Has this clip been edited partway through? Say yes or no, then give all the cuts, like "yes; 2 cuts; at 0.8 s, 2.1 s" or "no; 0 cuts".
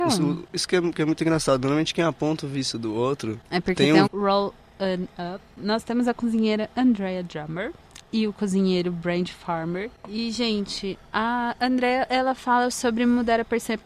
yes; 1 cut; at 4.1 s